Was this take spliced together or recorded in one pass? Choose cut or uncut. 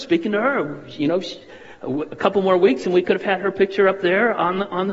uncut